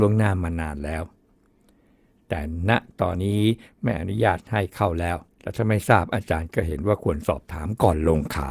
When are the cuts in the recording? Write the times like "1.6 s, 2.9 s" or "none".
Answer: 3.1 s, 5.3 s